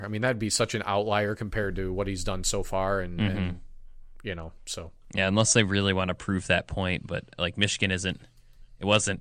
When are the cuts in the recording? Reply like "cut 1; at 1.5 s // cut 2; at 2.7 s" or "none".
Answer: none

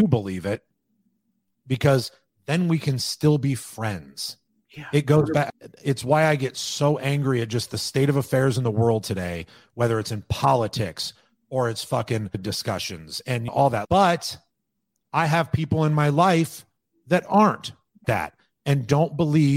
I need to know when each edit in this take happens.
cut 1; at 4.6 s // cut 2; at 13.9 s // cut 3; at 18.0 s

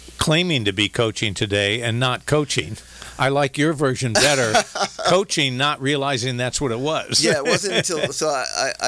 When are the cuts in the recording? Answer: none

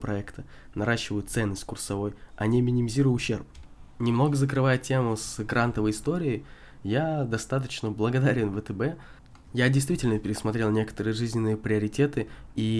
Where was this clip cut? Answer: none

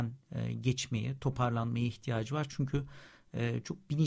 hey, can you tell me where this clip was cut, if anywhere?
none

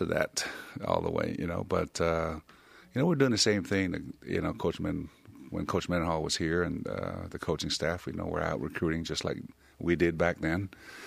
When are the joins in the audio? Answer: none

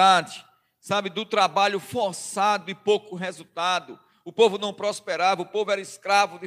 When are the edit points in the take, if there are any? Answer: none

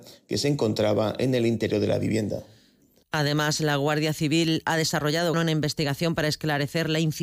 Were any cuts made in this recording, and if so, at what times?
cut 1; at 5.3 s

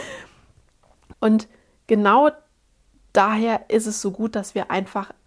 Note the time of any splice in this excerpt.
cut 1; at 1.1 s

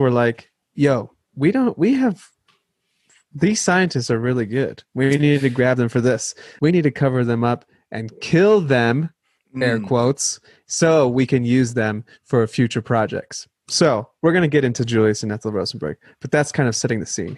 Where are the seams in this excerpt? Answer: cut 1; at 6.6 s

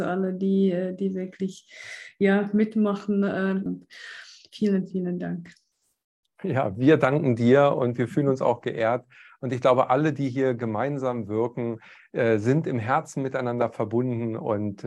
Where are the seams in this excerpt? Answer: cut 1; at 3.7 s

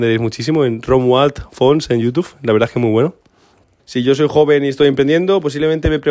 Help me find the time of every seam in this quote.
cut 1; at 3.8 s

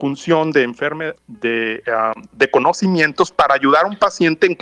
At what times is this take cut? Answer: cut 1; at 1.2 s

